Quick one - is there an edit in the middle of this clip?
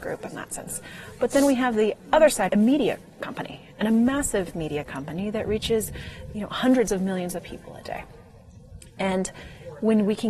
yes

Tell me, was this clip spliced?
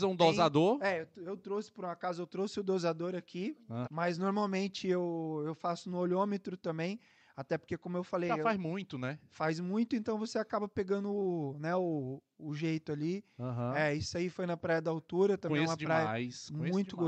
yes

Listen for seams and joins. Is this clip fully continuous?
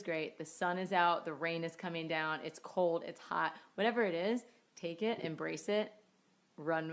yes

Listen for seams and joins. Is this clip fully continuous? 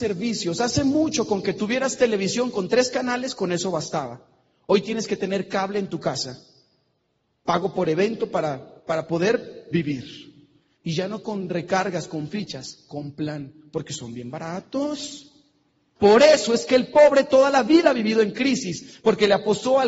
no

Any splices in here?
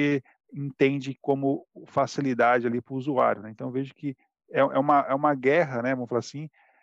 no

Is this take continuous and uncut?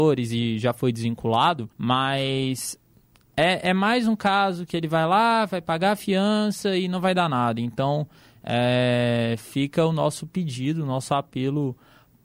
no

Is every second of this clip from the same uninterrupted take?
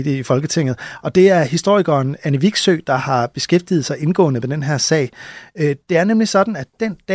yes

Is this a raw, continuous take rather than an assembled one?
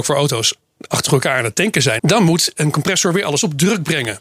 no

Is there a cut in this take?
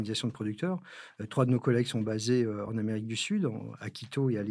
no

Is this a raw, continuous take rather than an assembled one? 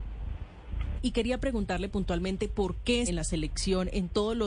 no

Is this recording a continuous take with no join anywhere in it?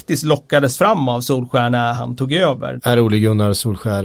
no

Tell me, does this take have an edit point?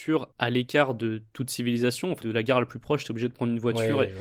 yes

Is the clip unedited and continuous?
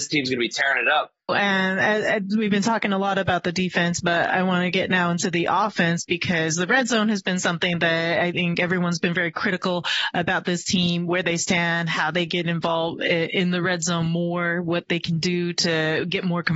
no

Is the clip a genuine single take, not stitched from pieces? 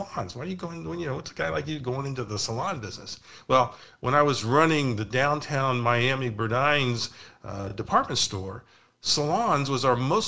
yes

